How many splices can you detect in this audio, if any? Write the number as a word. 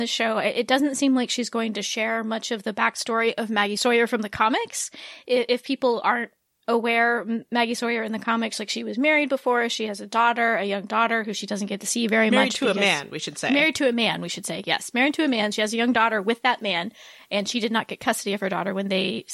zero